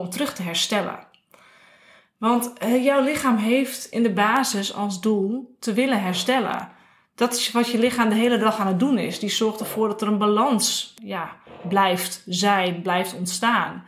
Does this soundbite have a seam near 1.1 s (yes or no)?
no